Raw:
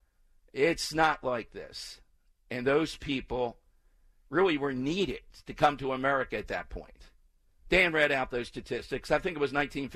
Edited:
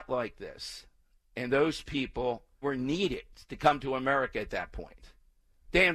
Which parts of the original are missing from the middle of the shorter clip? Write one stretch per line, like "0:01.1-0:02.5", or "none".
0:03.8-0:04.6